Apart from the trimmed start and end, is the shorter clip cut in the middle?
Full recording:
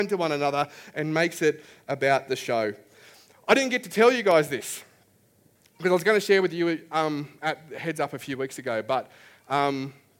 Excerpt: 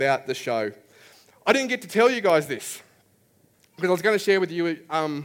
no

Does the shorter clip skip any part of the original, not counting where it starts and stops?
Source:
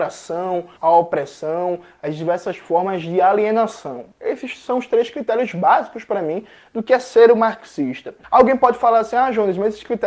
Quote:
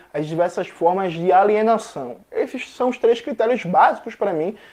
no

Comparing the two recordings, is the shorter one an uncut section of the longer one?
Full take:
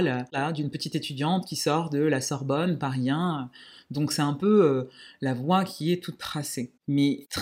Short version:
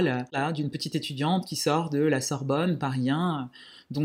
yes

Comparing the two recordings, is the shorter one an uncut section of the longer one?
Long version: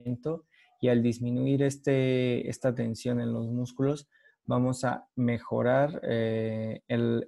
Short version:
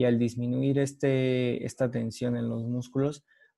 yes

